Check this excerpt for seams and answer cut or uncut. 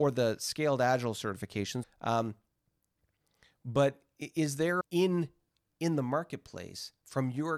cut